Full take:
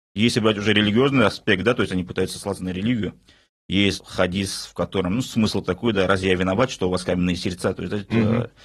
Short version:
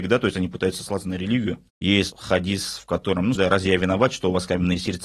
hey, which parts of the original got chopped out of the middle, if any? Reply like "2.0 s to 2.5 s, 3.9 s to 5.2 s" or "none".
3.2 s to 3.6 s, 5.2 s to 5.9 s